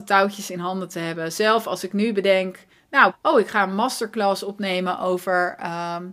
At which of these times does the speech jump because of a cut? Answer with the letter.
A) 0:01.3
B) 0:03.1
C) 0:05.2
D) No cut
B